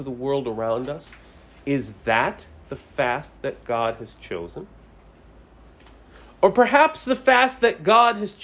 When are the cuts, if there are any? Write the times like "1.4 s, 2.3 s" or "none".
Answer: none